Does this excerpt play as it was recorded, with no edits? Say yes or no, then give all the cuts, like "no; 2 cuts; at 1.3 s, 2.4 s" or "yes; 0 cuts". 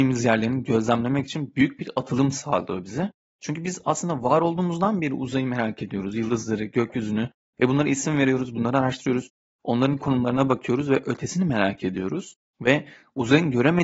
no; 1 cut; at 12.5 s